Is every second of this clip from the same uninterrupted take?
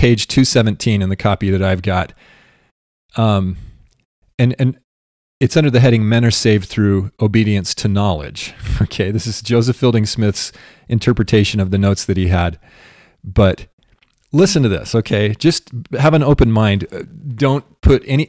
yes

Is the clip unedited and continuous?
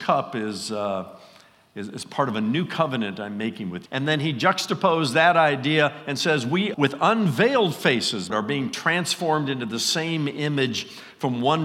no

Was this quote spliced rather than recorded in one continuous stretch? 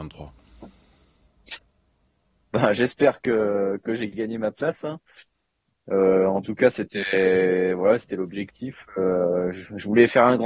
no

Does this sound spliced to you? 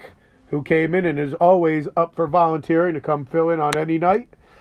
no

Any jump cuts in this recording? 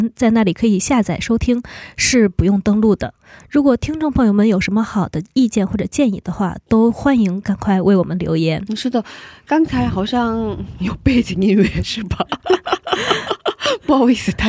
no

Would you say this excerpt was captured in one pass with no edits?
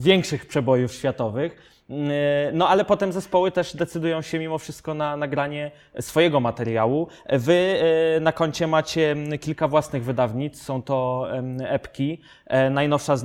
yes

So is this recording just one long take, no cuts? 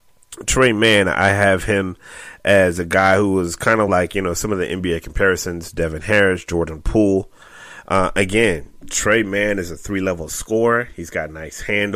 yes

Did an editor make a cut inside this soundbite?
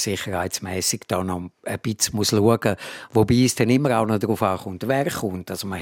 no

